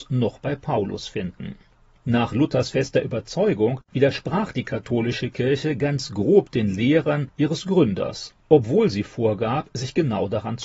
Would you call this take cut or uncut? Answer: uncut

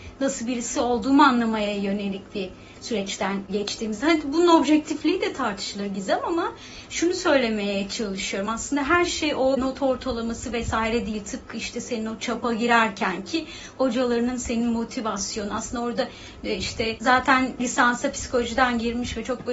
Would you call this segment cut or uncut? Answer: uncut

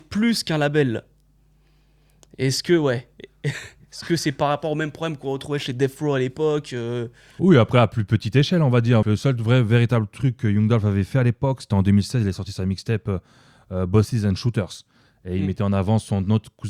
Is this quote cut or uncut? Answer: cut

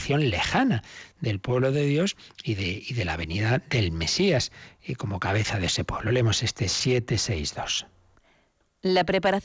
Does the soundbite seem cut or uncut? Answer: uncut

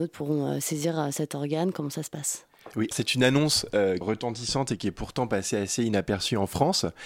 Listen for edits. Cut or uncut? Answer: cut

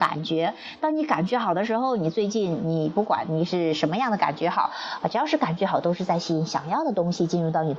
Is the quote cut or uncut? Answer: uncut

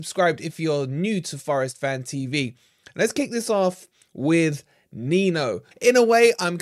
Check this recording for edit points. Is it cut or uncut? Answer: cut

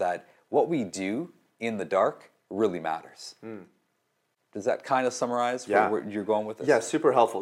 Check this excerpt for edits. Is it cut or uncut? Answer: uncut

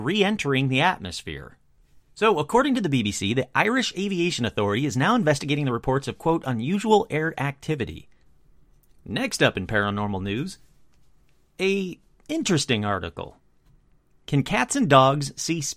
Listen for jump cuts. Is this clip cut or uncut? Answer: uncut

